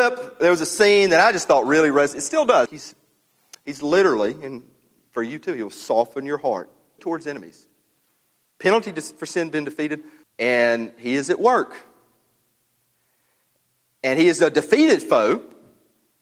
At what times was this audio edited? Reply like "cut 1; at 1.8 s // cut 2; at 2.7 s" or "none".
cut 1; at 2.7 s // cut 2; at 7.0 s // cut 3; at 10.2 s